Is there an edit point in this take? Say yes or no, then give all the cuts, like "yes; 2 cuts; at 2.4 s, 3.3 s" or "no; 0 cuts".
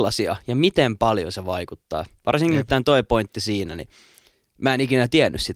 no; 0 cuts